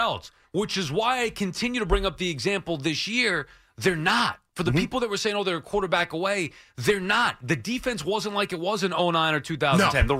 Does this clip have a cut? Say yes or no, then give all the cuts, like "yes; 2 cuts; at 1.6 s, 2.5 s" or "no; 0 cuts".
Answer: no; 0 cuts